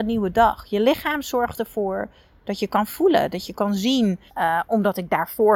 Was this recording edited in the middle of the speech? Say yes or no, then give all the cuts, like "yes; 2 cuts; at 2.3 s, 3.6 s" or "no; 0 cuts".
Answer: yes; 1 cut; at 4.3 s